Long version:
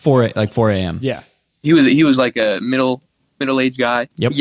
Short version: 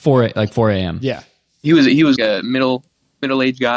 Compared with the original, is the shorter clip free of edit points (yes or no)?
no